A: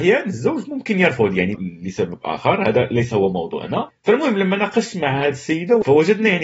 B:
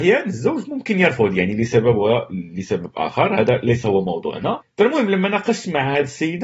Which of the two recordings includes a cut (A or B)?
A